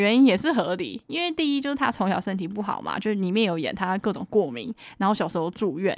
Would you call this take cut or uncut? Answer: uncut